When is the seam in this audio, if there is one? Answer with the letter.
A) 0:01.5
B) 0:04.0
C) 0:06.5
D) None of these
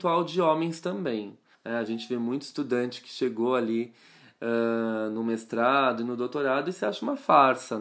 A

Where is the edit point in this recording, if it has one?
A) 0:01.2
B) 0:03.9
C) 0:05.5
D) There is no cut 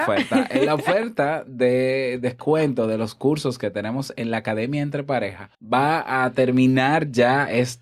C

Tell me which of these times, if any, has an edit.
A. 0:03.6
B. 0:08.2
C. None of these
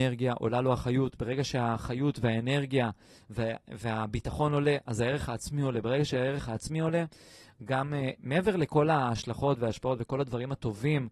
B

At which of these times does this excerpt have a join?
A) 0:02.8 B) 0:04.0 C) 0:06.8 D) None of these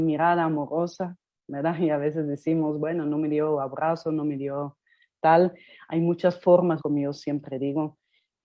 C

